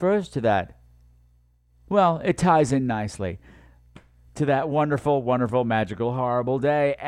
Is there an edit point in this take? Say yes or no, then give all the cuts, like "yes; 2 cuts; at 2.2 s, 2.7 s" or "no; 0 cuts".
no; 0 cuts